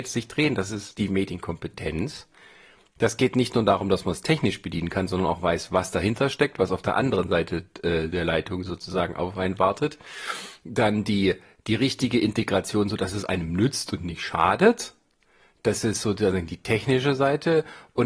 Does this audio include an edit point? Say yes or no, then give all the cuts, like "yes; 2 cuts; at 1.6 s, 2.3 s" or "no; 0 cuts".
no; 0 cuts